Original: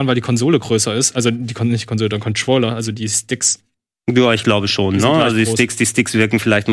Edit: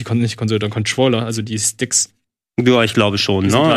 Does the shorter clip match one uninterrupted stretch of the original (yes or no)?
yes